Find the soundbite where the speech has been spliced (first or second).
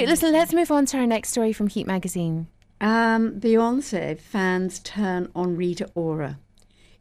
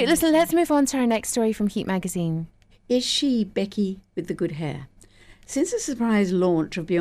second